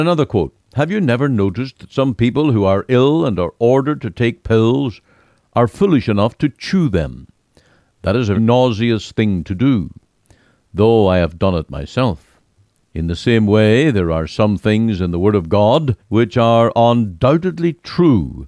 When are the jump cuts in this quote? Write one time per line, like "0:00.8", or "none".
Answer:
0:08.3
0:12.8
0:16.0